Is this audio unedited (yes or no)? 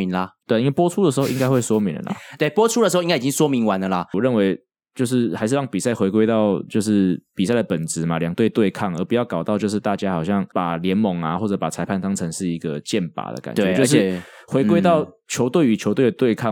yes